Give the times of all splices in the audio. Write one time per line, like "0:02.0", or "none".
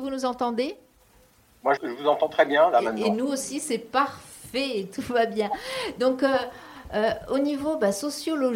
0:01.8